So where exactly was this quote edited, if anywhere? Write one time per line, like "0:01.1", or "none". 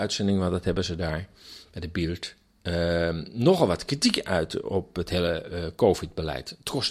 none

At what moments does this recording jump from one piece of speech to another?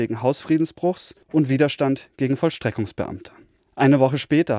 none

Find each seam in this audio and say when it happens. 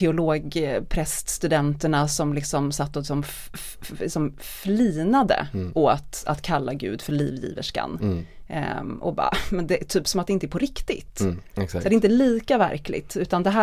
none

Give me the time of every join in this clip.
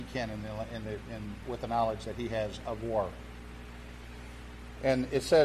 0:01.4

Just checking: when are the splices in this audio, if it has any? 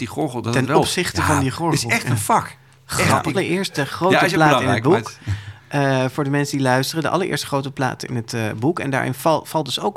0:03.3

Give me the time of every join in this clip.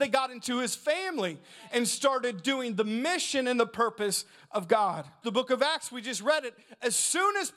0:05.2

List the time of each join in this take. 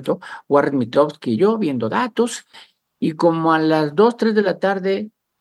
none

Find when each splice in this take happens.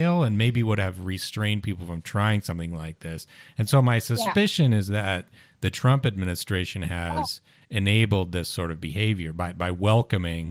none

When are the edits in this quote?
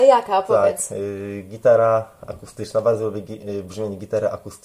none

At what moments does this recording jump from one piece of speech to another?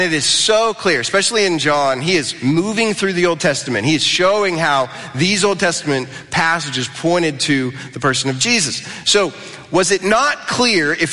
none

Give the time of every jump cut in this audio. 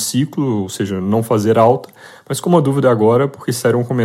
none

